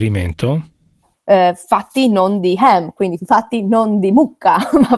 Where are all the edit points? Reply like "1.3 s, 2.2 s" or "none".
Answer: 1.1 s